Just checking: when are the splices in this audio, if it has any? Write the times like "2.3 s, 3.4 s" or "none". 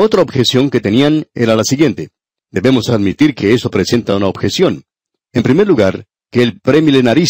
2.4 s, 5.2 s